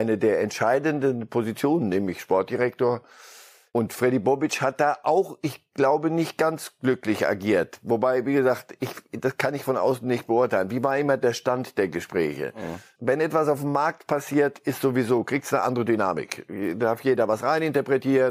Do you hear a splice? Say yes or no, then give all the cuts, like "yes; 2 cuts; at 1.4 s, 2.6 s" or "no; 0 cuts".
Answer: no; 0 cuts